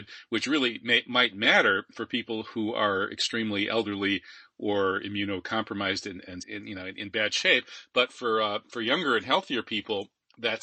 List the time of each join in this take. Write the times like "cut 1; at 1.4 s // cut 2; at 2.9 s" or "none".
cut 1; at 6.4 s